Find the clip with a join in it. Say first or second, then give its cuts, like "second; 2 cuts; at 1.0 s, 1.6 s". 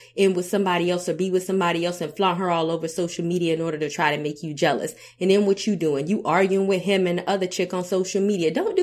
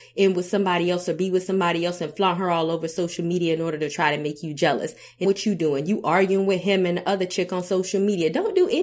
second; 1 cut; at 5.2 s